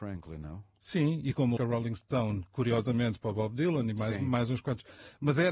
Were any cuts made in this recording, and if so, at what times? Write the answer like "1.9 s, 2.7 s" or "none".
1.6 s